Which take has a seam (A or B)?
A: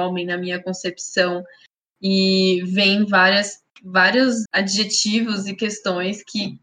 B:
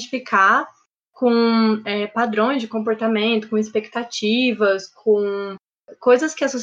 A